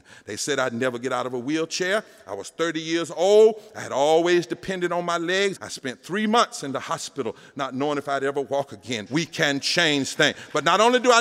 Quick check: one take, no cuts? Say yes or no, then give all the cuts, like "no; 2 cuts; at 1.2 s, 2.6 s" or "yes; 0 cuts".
no; 2 cuts; at 5.6 s, 9.1 s